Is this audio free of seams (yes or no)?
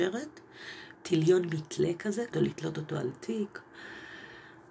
no